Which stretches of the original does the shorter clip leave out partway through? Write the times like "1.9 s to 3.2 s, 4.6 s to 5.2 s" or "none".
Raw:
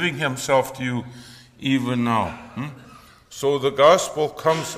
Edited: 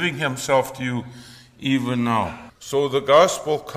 2.5 s to 3.2 s